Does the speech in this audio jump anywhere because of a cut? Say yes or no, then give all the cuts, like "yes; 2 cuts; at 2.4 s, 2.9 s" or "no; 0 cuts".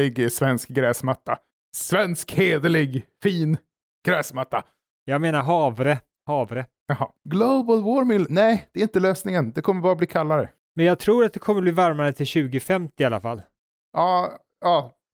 yes; 1 cut; at 7.2 s